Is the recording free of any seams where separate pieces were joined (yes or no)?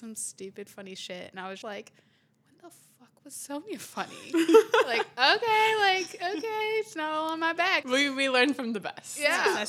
no